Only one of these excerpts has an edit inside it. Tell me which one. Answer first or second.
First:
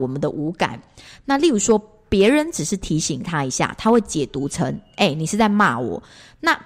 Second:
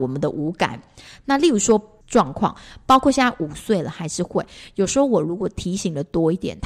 second